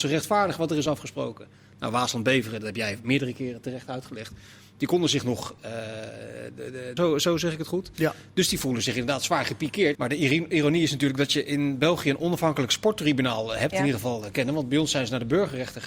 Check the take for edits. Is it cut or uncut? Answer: cut